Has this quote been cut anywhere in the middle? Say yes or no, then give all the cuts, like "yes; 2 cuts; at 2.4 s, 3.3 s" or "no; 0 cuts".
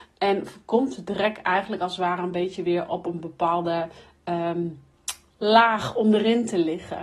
no; 0 cuts